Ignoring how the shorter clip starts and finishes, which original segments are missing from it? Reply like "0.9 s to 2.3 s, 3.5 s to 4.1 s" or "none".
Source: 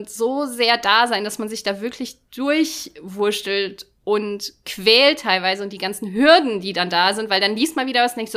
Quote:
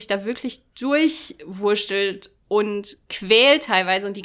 none